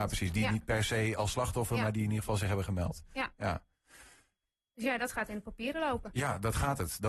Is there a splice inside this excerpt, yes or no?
no